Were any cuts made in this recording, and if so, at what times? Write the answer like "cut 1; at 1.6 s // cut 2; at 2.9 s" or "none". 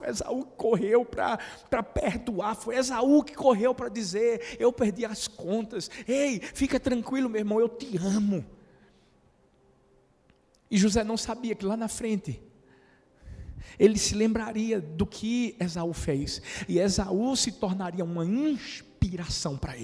none